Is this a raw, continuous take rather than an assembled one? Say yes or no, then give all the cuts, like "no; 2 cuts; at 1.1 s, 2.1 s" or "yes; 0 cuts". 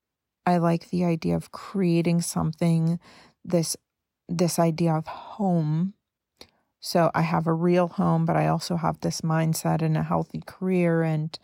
yes; 0 cuts